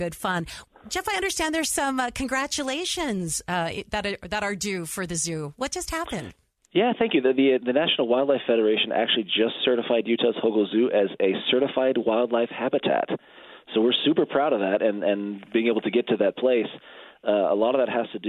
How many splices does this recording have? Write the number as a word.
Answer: zero